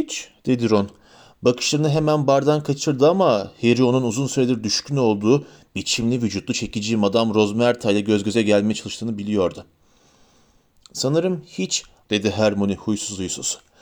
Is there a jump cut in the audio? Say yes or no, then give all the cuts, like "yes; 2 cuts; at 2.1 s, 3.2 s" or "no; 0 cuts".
yes; 1 cut; at 12.0 s